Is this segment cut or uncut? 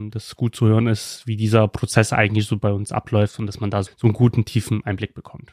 cut